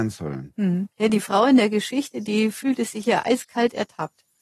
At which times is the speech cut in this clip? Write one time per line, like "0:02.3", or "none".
0:00.9